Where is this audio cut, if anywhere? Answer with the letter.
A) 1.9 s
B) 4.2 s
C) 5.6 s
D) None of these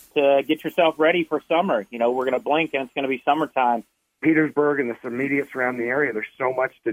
B